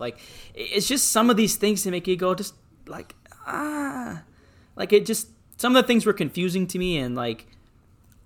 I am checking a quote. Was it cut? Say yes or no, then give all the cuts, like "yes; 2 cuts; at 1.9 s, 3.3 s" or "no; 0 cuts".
no; 0 cuts